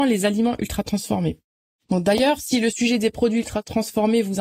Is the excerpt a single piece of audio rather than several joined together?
yes; 0 cuts

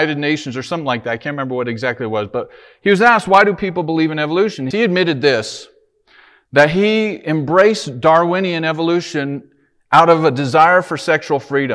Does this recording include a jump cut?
yes; 1 cut; at 4.7 s

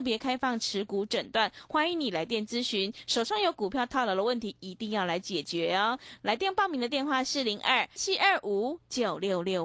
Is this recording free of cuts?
no; 1 cut; at 8.0 s

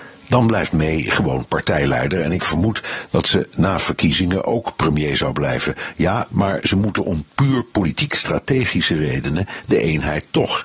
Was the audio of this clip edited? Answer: yes; 1 cut; at 6.3 s

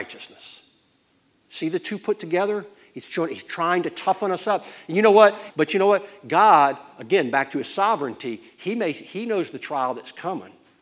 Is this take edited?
yes; 1 cut; at 5.5 s

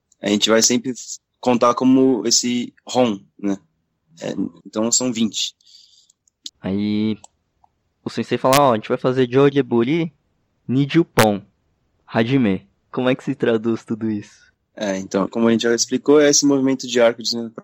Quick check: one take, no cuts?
no; 3 cuts; at 4.6 s, 6.5 s, 15.3 s

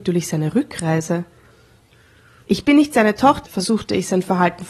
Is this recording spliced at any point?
yes; 1 cut; at 3.4 s

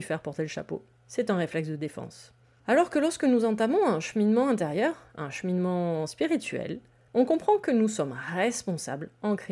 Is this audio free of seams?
yes; 0 cuts

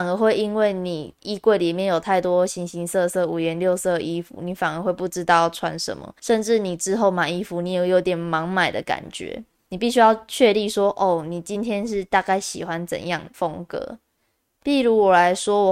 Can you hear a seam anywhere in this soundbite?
no; 0 cuts

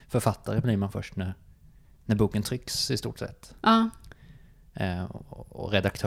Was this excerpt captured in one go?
yes; 0 cuts

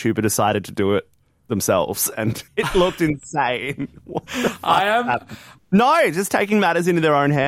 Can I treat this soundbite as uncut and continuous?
no; 2 cuts; at 2.5 s, 5.6 s

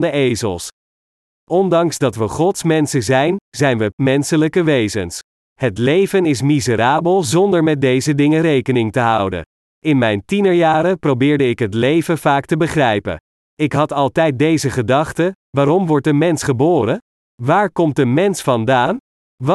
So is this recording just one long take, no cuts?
no; 2 cuts; at 3.9 s, 5.5 s

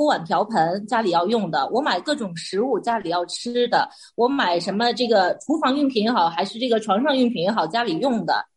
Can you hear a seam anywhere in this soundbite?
no; 0 cuts

